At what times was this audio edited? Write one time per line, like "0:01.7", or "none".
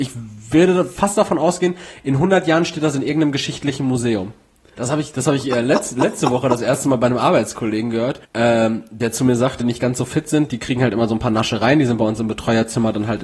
0:04.7
0:08.2
0:09.6